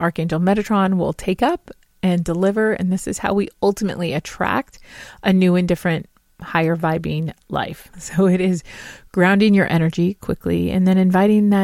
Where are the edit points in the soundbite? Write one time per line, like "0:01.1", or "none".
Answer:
0:07.9